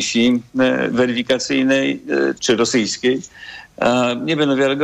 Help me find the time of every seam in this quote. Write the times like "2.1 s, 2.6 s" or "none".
2.4 s